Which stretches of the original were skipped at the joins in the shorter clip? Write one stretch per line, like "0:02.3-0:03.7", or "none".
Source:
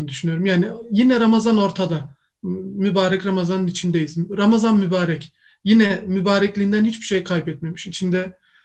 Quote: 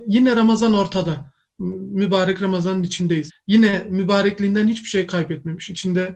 0:04.1-0:05.5